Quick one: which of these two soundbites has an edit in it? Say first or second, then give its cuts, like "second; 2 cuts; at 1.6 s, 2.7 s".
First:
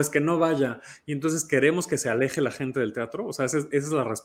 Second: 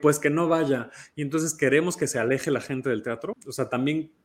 second; 1 cut; at 3.3 s